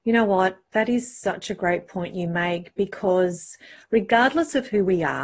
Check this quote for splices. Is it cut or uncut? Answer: uncut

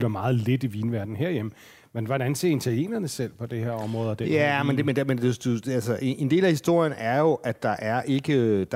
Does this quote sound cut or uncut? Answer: uncut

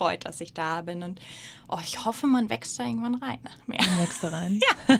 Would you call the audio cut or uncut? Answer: uncut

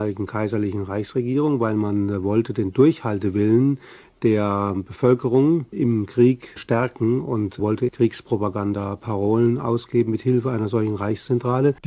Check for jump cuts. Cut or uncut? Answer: uncut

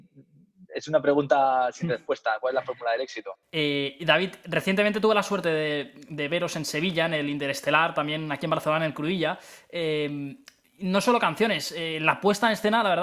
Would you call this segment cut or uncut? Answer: uncut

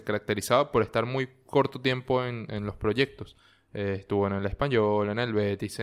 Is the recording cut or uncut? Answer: uncut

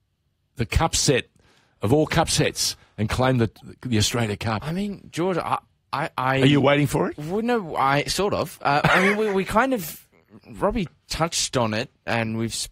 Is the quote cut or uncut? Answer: uncut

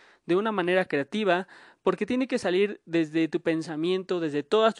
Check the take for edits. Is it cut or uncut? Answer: uncut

